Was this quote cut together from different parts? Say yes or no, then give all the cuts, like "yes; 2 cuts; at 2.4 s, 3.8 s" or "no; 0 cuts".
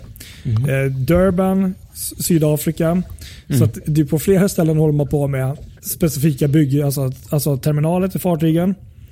yes; 1 cut; at 5.8 s